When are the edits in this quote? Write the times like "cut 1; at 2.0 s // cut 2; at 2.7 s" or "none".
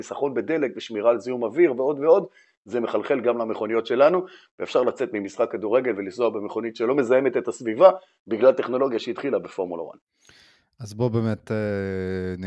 none